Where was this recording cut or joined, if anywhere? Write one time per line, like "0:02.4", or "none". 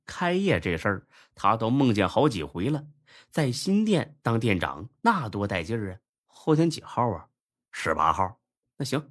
0:06.1